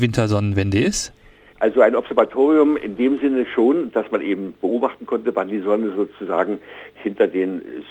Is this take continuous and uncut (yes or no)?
no